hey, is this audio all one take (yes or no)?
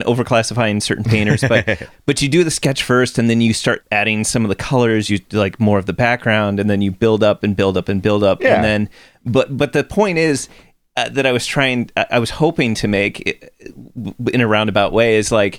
yes